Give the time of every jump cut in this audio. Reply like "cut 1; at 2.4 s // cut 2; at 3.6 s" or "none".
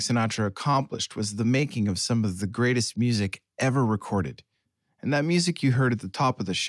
none